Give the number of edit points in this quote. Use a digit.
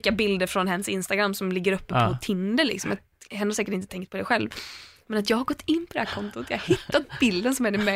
0